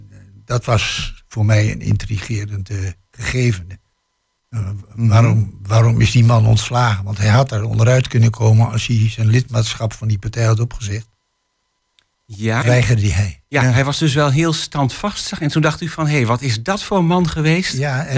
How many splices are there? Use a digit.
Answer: 1